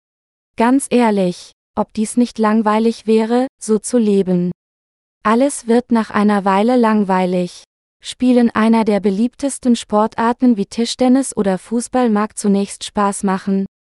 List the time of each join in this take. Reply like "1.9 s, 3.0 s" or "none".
1.7 s